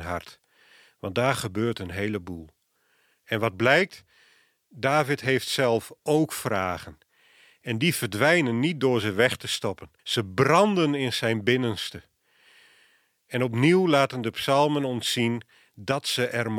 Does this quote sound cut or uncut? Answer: cut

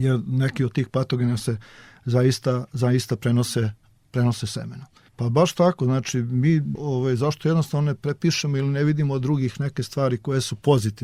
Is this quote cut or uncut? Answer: cut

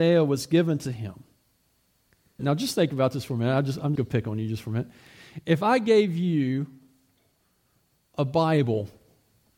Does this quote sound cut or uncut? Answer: cut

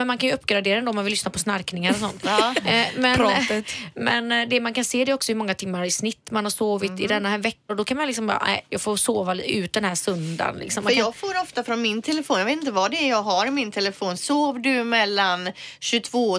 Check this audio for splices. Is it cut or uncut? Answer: cut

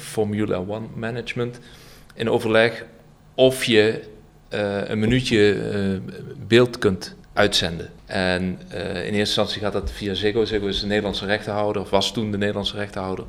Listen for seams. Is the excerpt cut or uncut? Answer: uncut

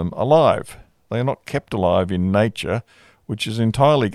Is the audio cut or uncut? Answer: uncut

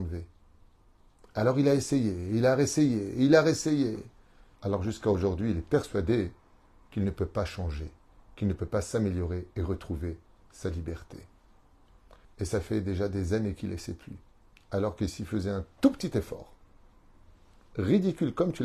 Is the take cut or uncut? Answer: cut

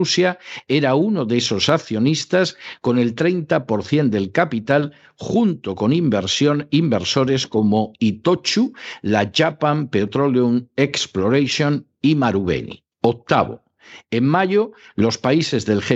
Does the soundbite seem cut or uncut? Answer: cut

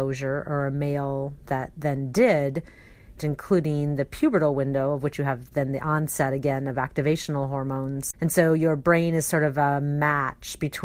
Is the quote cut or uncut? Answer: cut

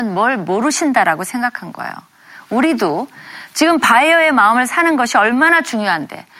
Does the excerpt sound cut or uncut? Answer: uncut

